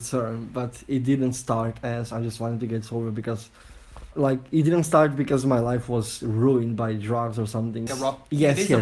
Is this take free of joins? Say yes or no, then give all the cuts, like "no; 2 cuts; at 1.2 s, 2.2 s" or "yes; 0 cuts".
no; 2 cuts; at 4.1 s, 7.9 s